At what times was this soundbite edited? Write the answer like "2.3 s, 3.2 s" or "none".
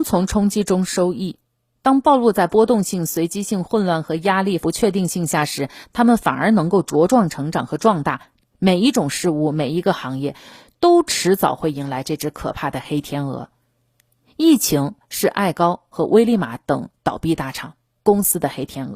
4.6 s, 8.4 s